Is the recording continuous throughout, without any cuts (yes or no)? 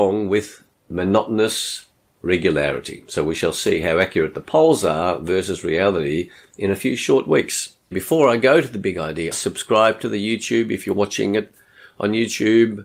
no